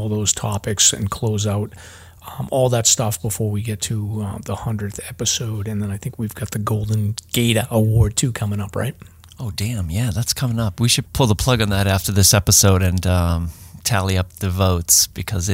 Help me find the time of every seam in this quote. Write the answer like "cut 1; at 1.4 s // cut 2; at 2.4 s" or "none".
cut 1; at 11.1 s